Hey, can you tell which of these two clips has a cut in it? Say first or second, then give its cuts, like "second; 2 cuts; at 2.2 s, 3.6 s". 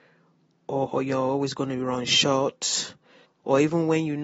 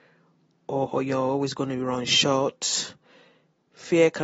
first; 1 cut; at 3.2 s